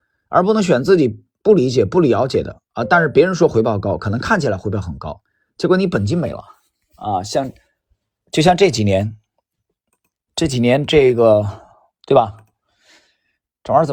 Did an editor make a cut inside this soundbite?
no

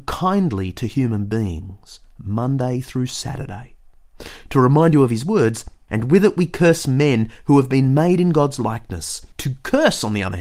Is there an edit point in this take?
yes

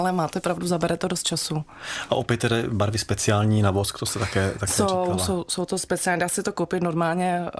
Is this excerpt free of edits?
yes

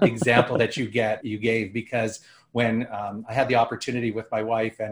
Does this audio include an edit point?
yes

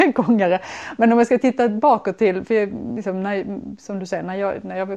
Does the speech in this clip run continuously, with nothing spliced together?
yes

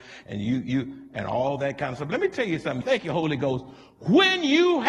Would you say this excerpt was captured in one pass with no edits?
no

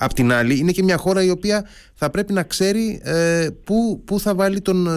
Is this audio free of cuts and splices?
yes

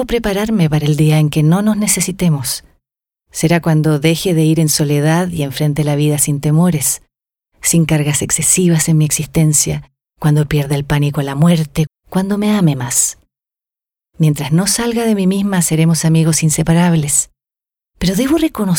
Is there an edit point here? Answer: yes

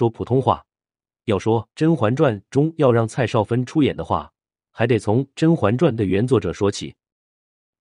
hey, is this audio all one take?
no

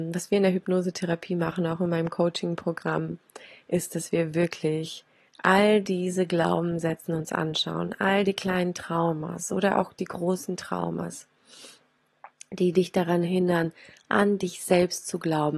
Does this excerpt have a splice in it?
no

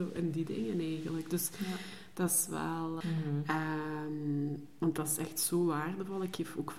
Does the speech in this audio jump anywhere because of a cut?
yes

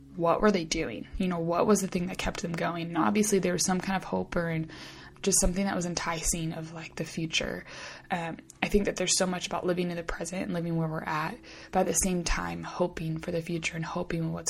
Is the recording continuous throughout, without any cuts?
no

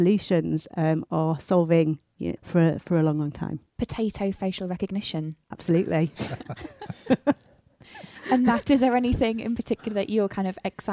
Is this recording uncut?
no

